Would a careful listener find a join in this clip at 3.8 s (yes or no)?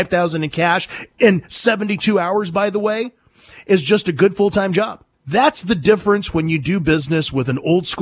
no